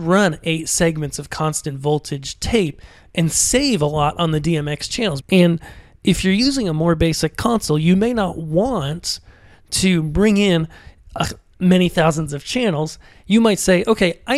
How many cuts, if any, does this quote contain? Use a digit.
1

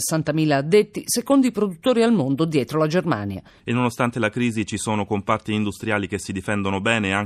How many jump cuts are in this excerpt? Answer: 1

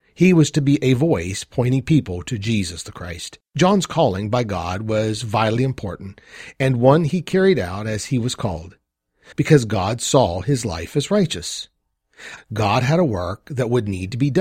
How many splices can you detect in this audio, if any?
3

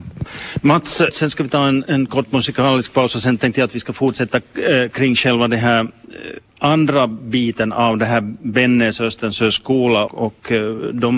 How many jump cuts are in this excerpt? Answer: 3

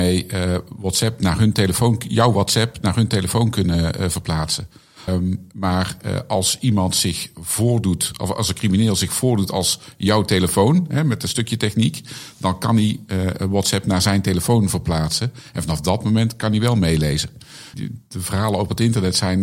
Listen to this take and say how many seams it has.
2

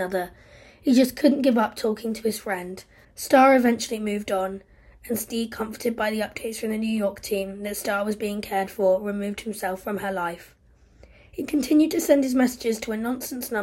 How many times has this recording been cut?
1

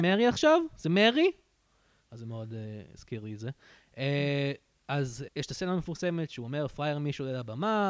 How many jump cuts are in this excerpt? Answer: 1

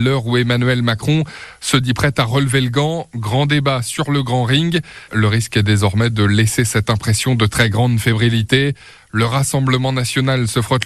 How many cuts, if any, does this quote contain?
1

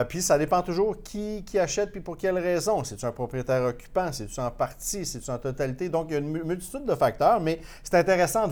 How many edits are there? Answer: 0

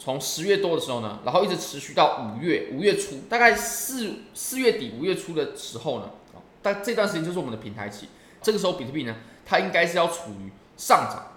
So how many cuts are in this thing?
1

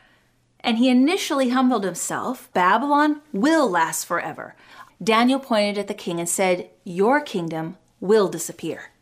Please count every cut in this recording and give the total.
2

